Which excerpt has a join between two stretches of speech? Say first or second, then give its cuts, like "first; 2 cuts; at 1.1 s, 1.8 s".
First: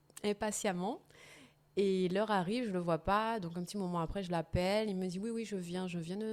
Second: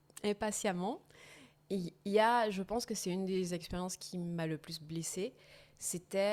second; 1 cut; at 1.6 s